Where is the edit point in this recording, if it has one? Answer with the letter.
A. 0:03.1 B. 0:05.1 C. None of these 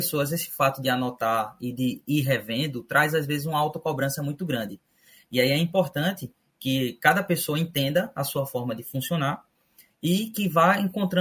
C